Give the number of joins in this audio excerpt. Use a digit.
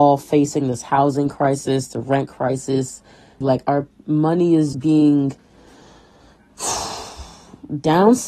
2